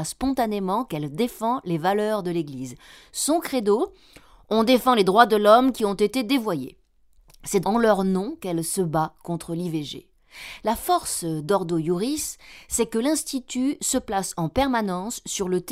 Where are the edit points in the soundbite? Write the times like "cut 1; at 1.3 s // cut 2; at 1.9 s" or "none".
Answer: cut 1; at 7.6 s